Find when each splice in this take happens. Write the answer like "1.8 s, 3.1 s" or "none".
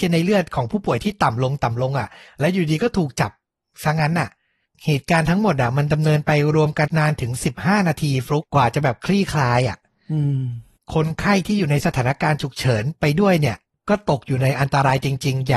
6.9 s, 8.4 s